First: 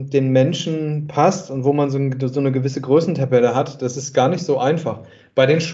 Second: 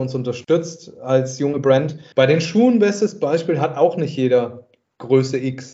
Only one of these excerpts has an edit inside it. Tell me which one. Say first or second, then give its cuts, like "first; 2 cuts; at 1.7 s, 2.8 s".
second; 1 cut; at 2.1 s